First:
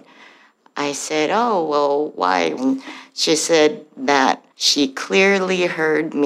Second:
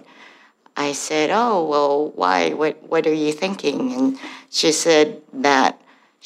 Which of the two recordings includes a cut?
first; 2 cuts; at 2.6 s, 4.5 s

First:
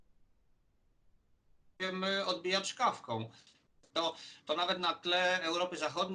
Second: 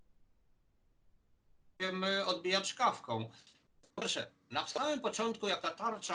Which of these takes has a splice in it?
first; 1 cut; at 3.9 s

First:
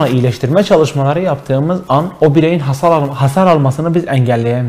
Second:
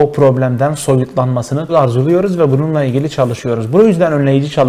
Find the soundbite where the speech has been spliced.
second; 1 cut; at 1.7 s

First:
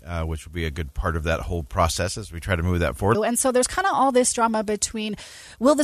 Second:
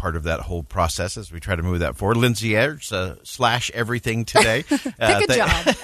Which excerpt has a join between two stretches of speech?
first; 1 cut; at 3.1 s

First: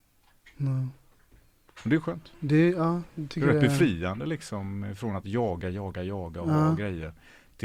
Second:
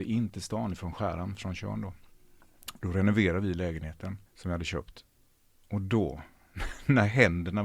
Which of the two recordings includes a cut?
second; 1 cut; at 4.3 s

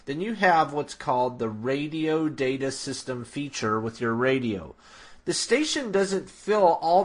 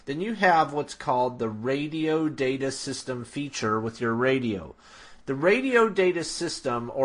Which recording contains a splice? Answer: first; 1 cut; at 5.2 s

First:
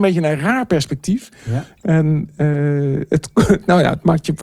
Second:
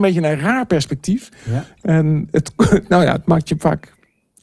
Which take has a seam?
second; 1 cut; at 2.3 s

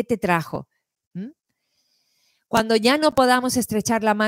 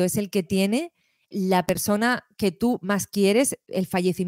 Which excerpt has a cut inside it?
second; 1 cut; at 1.3 s

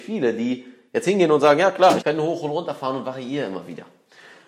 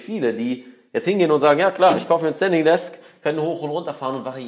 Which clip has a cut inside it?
first; 1 cut; at 2.0 s

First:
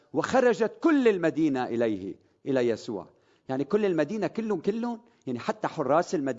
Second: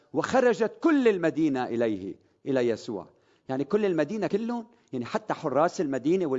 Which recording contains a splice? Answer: second; 1 cut; at 4.3 s

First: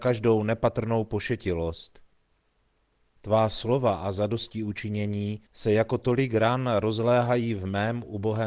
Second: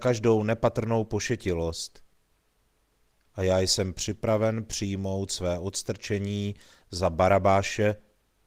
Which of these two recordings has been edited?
first; 2 cuts; at 3.1 s, 5.5 s

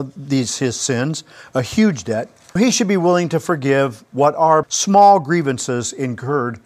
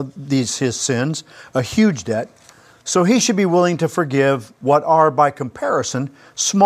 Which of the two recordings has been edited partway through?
first; 2 cuts; at 2.6 s, 4.6 s

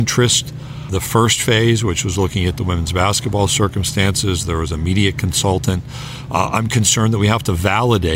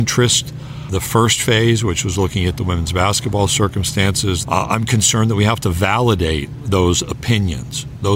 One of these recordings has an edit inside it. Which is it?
second; 1 cut; at 4.4 s

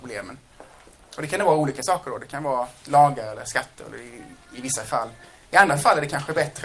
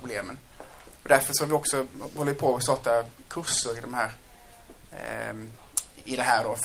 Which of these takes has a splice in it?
first; 2 cuts; at 1.0 s, 2.8 s

